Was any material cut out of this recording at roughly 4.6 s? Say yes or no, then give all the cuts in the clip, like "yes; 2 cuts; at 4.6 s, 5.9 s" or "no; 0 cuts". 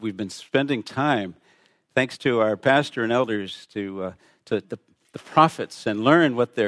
yes; 1 cut; at 4.6 s